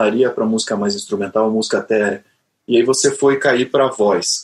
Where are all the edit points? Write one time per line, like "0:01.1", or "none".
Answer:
0:02.6